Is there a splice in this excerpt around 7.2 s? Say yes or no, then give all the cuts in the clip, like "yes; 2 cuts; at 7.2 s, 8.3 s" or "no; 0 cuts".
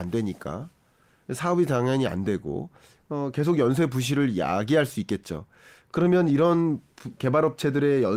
yes; 1 cut; at 7.2 s